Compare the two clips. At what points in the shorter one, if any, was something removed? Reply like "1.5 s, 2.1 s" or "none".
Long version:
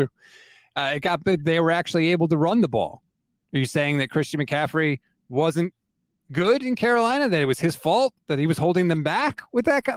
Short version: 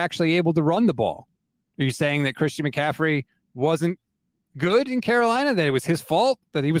none